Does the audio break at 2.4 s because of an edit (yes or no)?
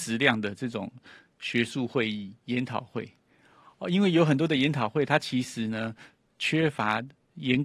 no